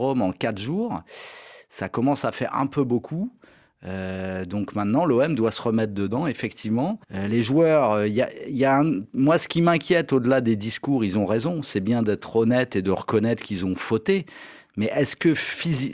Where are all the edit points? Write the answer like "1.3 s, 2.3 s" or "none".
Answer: 7.0 s